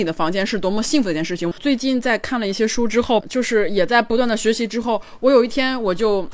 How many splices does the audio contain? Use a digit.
2